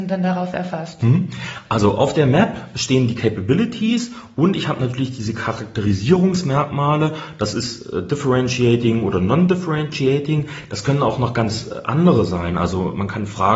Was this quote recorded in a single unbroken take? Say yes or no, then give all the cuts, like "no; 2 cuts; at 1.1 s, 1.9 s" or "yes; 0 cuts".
yes; 0 cuts